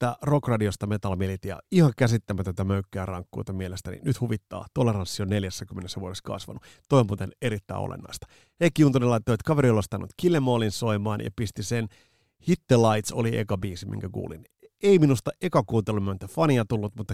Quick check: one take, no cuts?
yes; 0 cuts

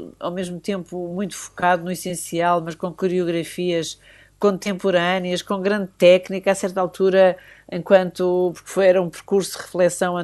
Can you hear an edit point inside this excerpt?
no; 0 cuts

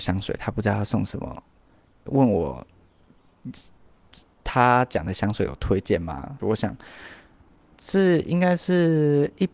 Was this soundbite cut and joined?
yes; 2 cuts; at 2.1 s, 6.4 s

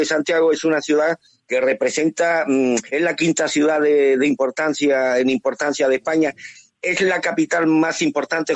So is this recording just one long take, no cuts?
yes; 0 cuts

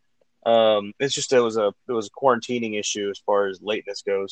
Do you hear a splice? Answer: no; 0 cuts

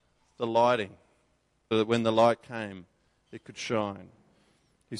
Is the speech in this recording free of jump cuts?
no; 1 cut; at 1.7 s

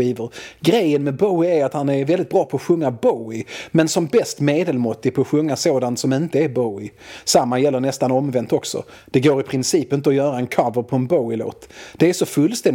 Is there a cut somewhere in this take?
no; 0 cuts

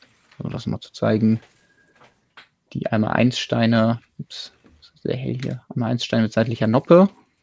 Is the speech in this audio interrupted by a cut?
no; 0 cuts

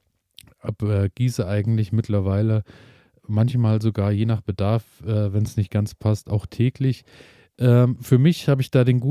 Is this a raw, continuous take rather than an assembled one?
no; 1 cut; at 3.2 s

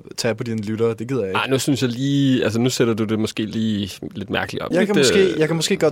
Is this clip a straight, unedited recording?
no; 1 cut; at 4.7 s

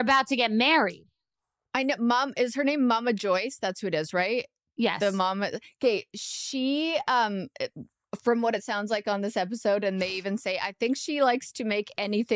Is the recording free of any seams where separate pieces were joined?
yes; 0 cuts

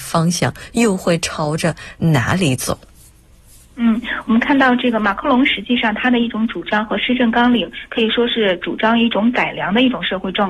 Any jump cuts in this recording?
no; 0 cuts

